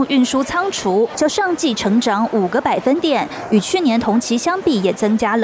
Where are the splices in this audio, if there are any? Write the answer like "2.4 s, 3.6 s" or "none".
1.2 s